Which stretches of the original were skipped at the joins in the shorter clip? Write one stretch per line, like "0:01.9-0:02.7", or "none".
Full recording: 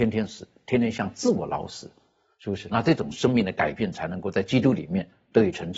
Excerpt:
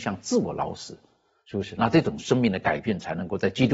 none